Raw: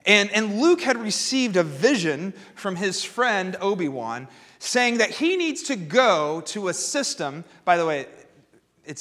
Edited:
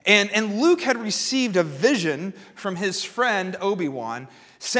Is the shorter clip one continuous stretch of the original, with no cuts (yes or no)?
yes